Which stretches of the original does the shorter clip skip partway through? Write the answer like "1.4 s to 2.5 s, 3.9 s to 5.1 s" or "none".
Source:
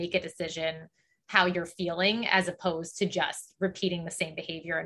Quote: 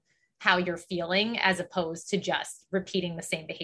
none

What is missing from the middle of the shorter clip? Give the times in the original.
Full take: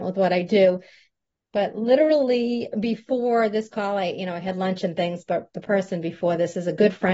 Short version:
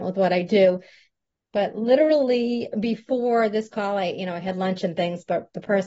none

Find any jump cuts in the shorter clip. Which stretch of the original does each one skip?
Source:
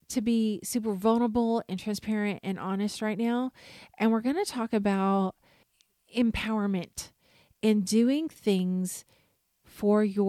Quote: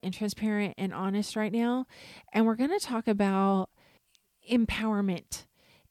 none

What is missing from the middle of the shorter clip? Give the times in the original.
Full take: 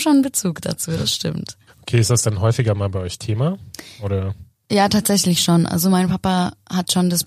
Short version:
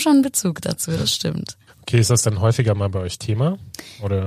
none

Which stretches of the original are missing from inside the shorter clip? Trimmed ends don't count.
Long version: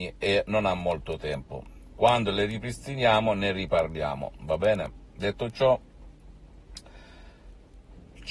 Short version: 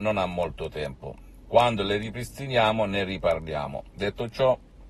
4.4 s to 5.1 s

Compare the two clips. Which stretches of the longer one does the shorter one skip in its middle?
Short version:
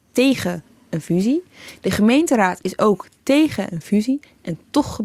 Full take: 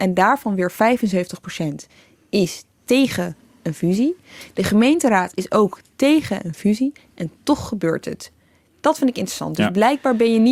none

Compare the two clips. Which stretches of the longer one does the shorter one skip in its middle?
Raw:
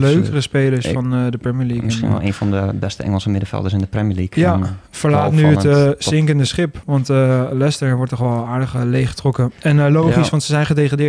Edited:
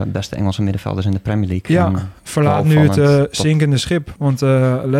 none

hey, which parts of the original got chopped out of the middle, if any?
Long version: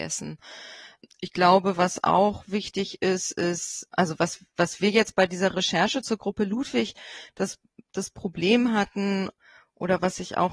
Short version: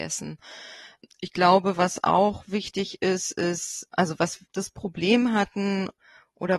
4.5 s to 7.9 s

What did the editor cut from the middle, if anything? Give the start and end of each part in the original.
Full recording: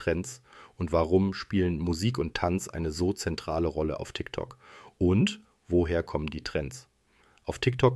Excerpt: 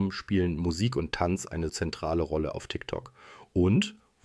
2.9 s to 3.1 s

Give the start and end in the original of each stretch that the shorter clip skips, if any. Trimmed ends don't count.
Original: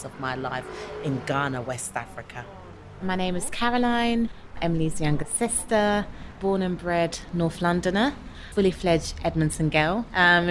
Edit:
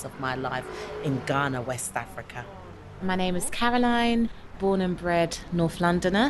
4.5 s to 6.3 s

